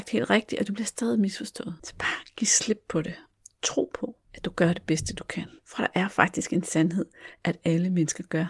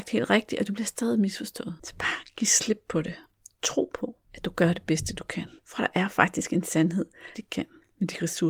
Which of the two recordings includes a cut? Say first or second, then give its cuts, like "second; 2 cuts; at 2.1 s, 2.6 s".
second; 1 cut; at 7.3 s